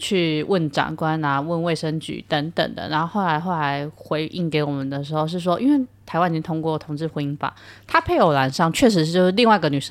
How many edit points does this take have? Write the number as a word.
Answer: zero